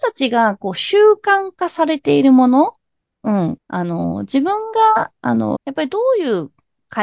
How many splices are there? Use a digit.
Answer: 2